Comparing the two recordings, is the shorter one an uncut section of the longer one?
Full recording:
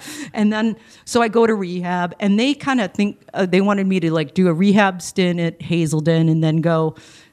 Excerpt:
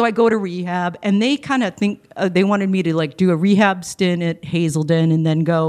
yes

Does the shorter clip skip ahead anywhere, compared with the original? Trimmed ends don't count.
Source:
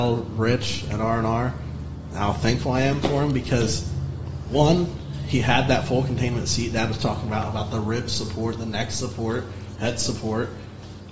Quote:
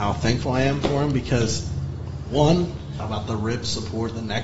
yes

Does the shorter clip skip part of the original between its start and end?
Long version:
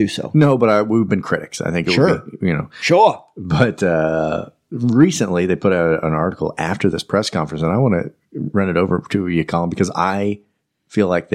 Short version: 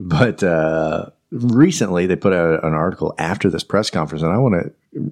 no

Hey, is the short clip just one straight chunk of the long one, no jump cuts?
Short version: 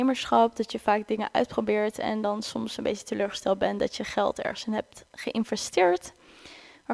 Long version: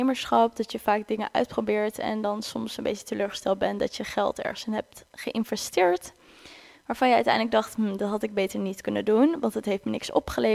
yes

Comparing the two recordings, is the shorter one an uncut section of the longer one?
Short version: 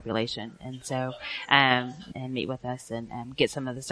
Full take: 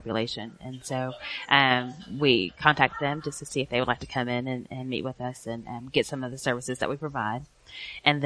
no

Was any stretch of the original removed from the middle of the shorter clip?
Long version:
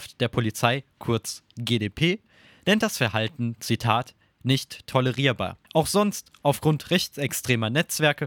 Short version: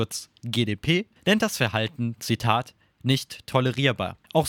yes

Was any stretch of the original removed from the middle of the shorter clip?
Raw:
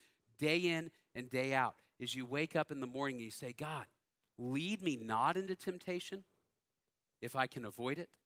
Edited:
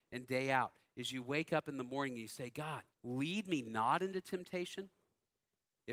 yes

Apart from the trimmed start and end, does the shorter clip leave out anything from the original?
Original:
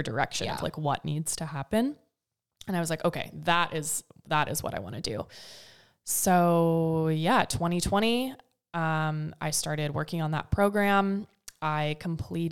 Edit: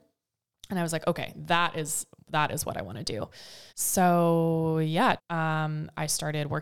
yes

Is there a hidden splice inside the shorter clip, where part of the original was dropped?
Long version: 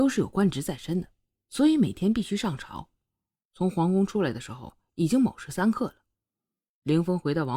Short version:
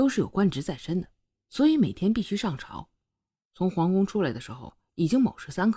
no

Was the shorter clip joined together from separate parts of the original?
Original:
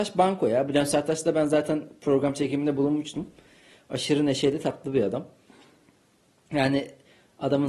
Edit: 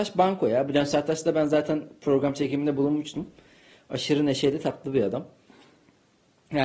no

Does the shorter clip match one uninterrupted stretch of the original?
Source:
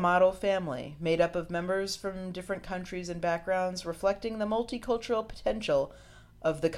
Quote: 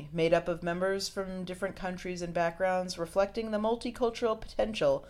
yes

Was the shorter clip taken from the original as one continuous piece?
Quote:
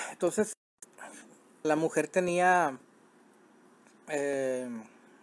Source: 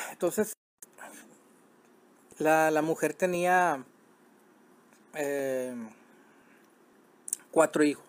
no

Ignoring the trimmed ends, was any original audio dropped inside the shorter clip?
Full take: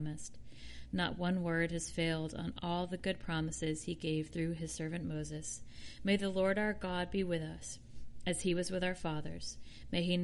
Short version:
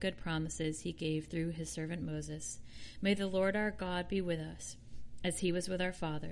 no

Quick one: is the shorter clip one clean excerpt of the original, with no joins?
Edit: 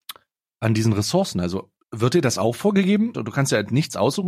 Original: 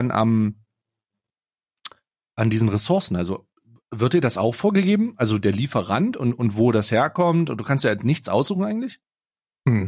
no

